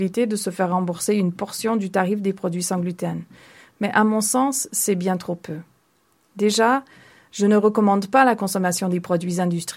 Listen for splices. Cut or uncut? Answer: uncut